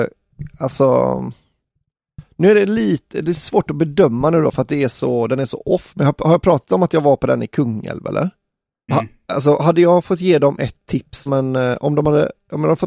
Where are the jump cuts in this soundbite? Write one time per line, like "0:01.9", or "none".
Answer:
0:08.9
0:11.3